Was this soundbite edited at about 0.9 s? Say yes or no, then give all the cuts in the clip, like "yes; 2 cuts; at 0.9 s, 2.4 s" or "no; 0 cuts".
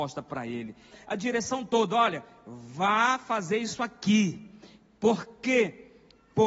yes; 1 cut; at 0.9 s